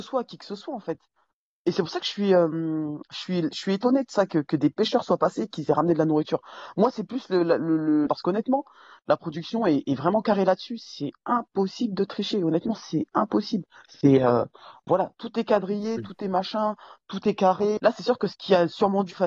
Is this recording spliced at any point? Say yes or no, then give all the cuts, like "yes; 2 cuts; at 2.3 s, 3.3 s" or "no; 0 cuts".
yes; 2 cuts; at 8.1 s, 17.8 s